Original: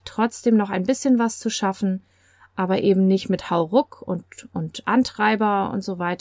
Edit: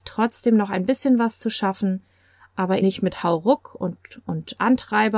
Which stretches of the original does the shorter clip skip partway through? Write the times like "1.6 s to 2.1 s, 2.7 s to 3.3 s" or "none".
2.8 s to 3.1 s